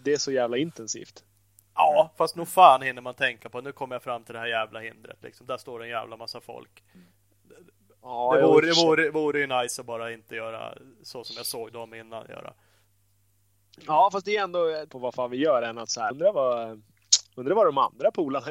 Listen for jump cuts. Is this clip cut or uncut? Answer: cut